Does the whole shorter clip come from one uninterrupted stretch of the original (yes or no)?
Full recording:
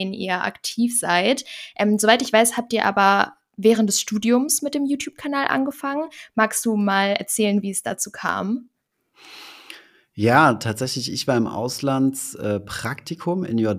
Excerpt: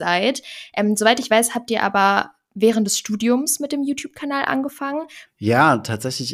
no